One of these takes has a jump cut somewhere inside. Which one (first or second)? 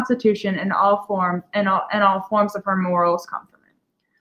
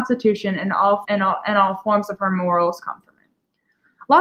second